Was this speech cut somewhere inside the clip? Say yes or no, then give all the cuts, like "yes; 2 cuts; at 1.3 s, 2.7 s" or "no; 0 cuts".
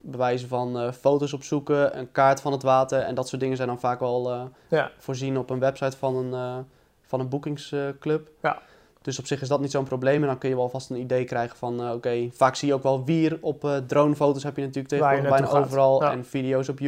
no; 0 cuts